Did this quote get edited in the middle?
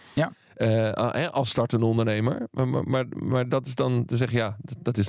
no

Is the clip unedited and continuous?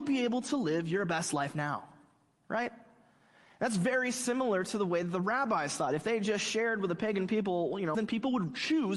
no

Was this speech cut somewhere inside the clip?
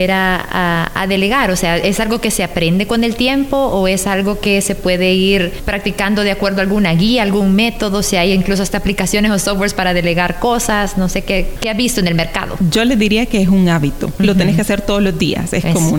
no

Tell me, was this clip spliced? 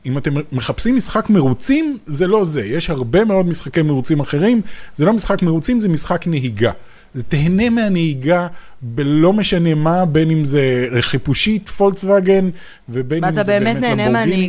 no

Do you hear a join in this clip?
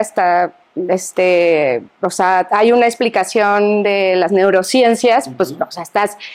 no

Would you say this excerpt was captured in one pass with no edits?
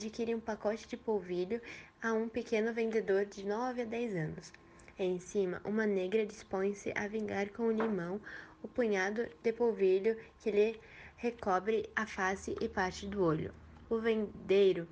no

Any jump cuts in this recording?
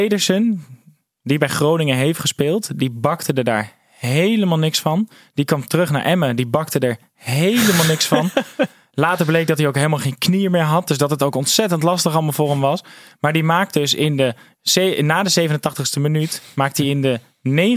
no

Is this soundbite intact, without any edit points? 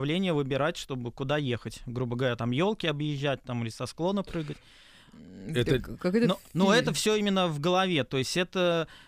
yes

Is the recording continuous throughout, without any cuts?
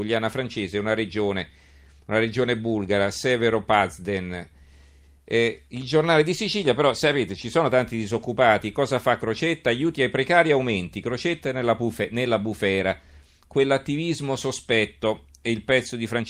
yes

